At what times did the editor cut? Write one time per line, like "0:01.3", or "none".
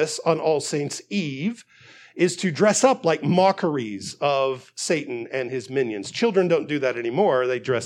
none

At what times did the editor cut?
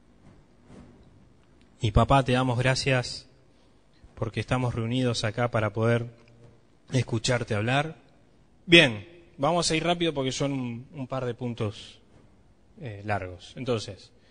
0:08.5

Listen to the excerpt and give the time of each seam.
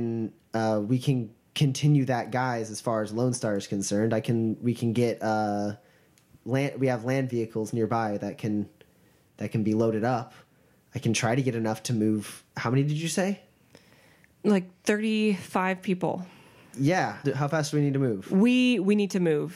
0:17.2

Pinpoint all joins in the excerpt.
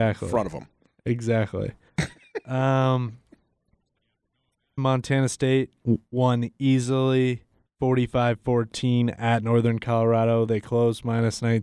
0:01.9
0:04.8
0:10.5

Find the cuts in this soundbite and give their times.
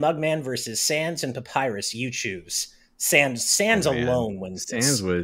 none

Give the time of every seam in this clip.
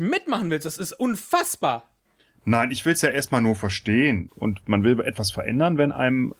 0:04.3

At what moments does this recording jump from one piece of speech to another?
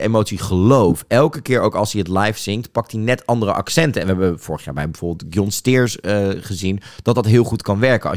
none

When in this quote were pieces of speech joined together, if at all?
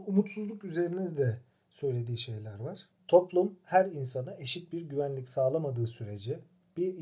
0:03.0

